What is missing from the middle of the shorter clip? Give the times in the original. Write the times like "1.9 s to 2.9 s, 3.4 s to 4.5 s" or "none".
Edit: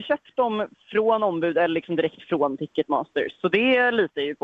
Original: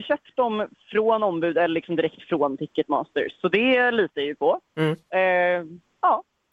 none